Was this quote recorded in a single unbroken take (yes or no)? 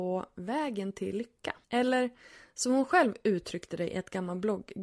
no